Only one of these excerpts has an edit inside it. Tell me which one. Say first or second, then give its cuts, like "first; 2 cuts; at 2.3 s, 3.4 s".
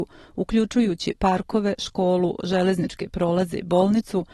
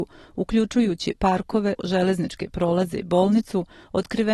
second; 1 cut; at 1.8 s